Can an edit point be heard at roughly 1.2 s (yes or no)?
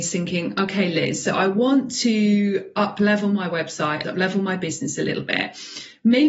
no